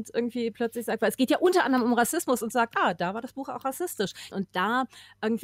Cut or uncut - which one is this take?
cut